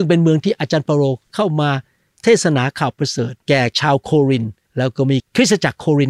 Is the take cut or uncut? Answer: cut